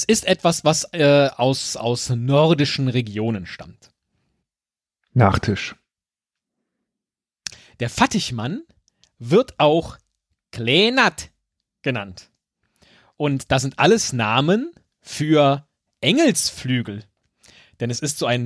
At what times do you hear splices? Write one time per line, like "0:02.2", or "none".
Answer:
none